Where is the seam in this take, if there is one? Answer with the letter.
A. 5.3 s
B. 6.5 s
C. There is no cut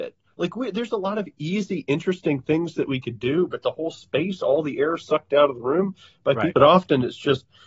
B